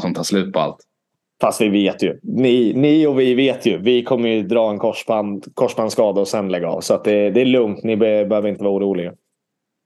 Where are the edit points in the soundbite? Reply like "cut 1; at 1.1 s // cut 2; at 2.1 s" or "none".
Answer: none